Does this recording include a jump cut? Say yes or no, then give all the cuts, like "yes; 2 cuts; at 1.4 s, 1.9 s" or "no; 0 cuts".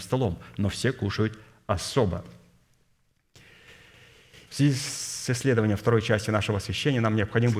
yes; 1 cut; at 4.5 s